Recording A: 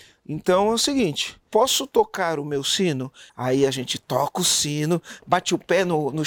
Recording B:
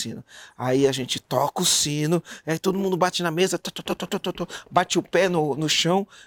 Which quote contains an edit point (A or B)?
A